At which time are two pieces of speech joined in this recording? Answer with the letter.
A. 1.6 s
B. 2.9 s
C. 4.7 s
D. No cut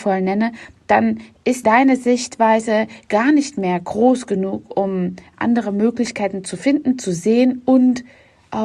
A